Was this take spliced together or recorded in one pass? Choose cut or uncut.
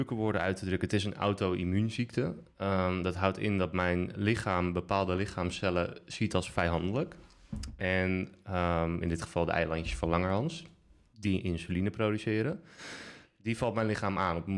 uncut